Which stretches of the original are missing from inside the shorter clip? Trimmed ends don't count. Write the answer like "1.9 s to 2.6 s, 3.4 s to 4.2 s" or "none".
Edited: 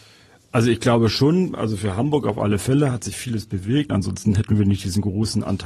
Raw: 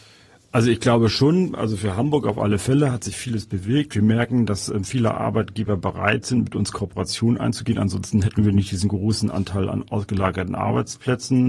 3.9 s to 7.8 s